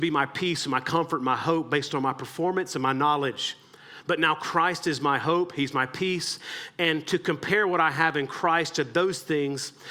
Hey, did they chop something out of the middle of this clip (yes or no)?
no